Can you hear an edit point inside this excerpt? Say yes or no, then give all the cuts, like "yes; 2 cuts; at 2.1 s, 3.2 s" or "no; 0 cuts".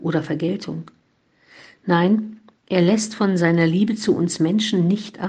no; 0 cuts